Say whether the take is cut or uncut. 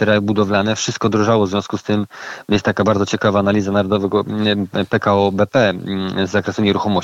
uncut